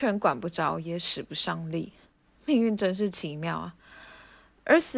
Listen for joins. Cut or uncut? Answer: uncut